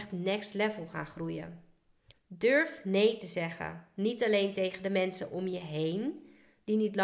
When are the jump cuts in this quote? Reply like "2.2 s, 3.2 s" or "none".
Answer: 2.1 s